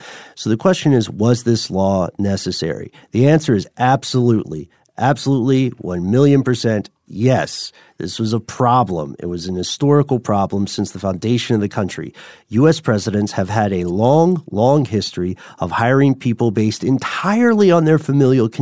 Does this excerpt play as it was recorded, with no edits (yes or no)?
yes